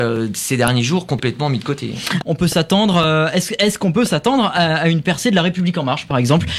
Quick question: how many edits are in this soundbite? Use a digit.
1